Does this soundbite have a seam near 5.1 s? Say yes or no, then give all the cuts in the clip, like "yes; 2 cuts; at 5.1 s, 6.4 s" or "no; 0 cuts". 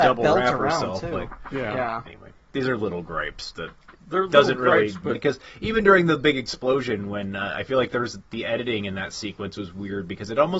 yes; 2 cuts; at 2.1 s, 5.1 s